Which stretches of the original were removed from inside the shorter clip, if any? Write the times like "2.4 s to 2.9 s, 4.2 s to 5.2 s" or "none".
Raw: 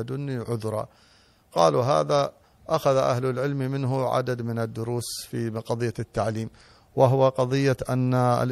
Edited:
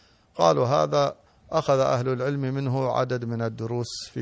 none